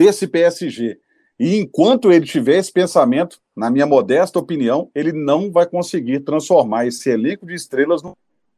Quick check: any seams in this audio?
no; 0 cuts

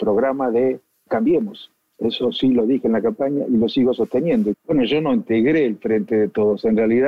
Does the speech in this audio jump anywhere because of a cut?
yes; 2 cuts; at 1.1 s, 4.5 s

